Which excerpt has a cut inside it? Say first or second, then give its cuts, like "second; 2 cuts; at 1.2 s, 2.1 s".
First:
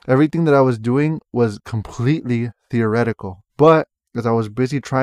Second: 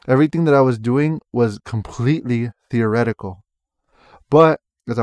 first; 1 cut; at 3.5 s